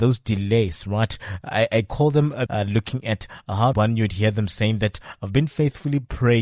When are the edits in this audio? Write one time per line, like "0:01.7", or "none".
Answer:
0:02.5
0:03.7

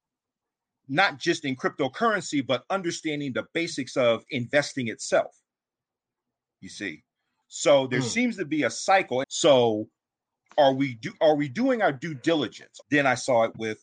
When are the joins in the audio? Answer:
0:07.4
0:09.2
0:12.8

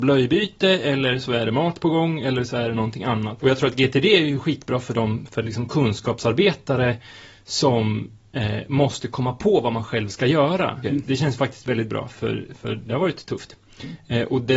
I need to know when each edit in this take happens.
0:03.4
0:10.8

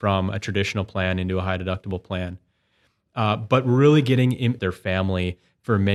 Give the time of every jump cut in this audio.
0:04.6

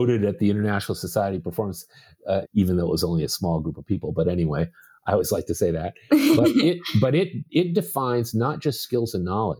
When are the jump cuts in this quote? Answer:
0:02.4

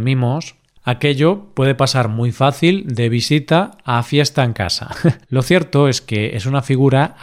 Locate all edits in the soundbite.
0:05.2

